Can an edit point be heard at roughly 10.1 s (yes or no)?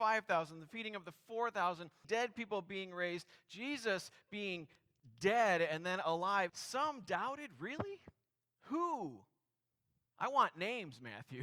no